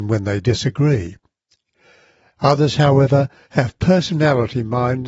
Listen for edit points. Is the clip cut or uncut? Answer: uncut